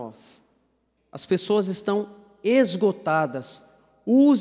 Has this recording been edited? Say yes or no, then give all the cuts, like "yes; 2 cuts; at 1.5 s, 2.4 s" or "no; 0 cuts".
yes; 1 cut; at 1.0 s